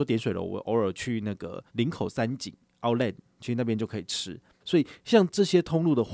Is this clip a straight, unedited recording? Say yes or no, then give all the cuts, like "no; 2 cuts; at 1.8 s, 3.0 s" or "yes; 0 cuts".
no; 2 cuts; at 1.7 s, 4.6 s